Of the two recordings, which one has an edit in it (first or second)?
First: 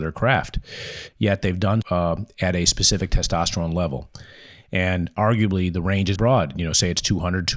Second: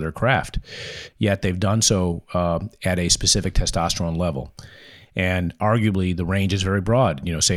first